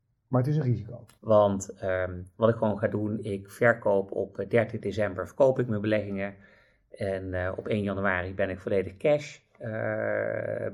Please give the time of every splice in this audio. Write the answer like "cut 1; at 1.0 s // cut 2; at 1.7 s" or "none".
cut 1; at 1.2 s